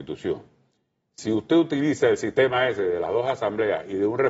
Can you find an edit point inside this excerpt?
yes; 1 cut; at 1.1 s

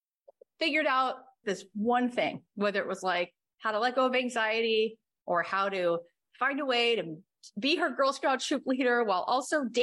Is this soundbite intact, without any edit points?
no; 1 cut; at 1.4 s

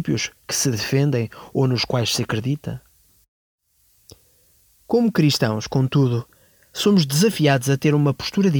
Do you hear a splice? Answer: no; 0 cuts

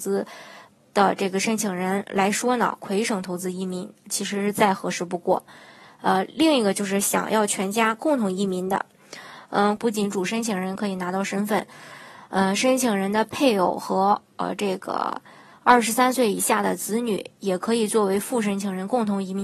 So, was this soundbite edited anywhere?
yes; 1 cut; at 9.8 s

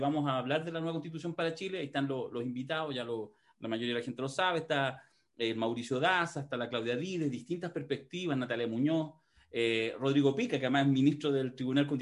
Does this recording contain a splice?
no; 0 cuts

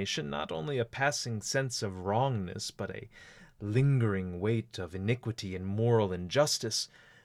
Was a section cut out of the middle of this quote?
no; 0 cuts

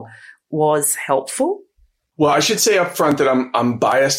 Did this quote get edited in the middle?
no; 0 cuts

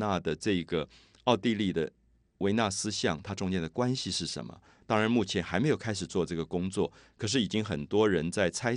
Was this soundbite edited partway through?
no; 0 cuts

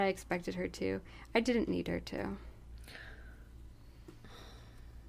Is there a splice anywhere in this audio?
no; 0 cuts

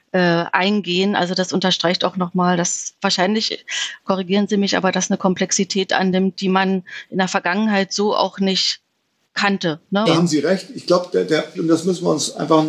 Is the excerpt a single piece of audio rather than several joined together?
no; 2 cuts; at 10.1 s, 11.5 s

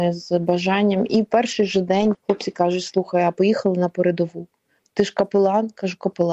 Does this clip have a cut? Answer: yes; 1 cut; at 2.1 s

